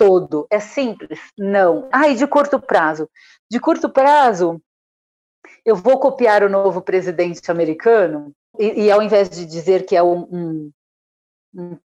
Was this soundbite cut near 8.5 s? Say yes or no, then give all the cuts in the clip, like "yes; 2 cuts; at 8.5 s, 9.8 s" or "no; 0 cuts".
yes; 2 cuts; at 1.9 s, 8.5 s